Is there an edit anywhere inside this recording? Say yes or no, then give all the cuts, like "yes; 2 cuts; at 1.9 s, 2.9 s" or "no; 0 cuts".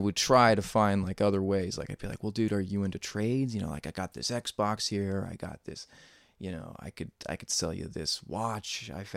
no; 0 cuts